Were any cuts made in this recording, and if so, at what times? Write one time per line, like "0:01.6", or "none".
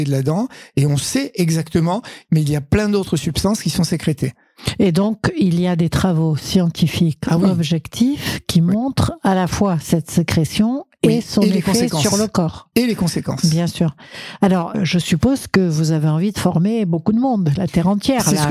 0:02.2
0:14.7